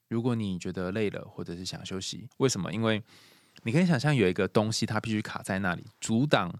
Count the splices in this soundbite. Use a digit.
1